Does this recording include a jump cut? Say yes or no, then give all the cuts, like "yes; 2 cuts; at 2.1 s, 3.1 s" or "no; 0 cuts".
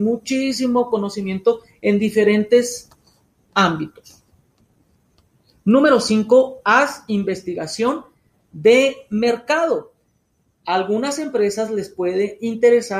no; 0 cuts